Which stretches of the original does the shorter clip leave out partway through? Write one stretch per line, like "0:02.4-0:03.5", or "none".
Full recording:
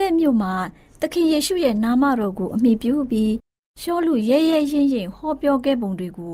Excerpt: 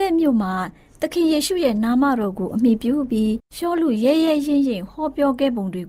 0:03.5-0:03.7